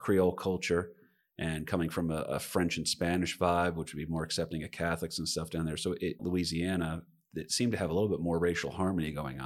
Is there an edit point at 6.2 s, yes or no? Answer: yes